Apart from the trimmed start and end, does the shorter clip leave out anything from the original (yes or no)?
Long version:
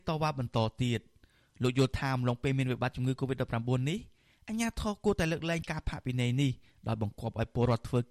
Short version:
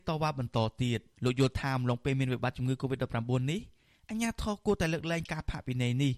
yes